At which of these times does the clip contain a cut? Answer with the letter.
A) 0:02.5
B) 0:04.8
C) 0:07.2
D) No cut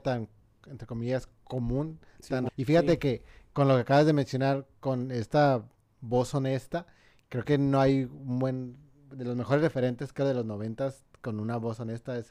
A